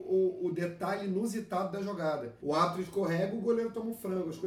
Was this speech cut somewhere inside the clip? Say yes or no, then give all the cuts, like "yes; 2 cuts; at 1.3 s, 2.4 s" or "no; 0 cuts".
yes; 1 cut; at 2.4 s